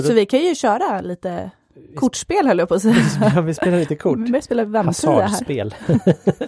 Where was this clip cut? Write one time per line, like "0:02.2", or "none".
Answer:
none